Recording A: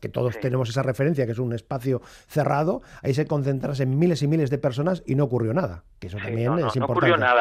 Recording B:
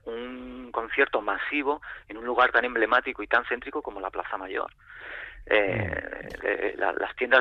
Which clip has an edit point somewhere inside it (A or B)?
B